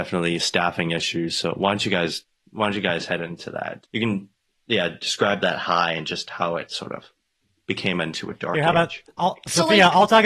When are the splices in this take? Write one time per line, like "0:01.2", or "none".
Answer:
0:03.8